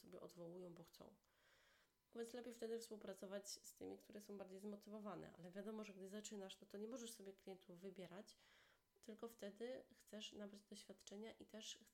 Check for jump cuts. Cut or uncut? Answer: uncut